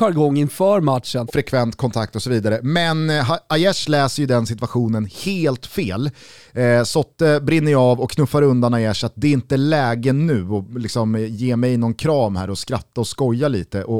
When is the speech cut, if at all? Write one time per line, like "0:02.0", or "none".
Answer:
0:01.3

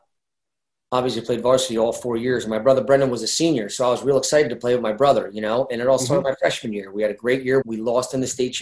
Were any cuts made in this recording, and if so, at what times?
0:07.6

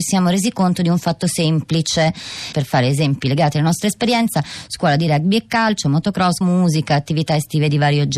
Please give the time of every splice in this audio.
0:02.5
0:06.4

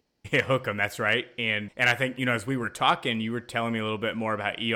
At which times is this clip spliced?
0:01.7

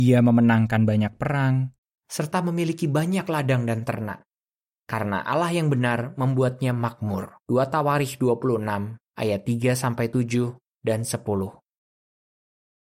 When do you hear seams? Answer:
0:02.0
0:07.4

